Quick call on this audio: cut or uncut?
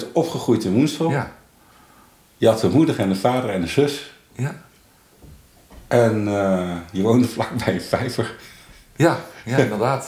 uncut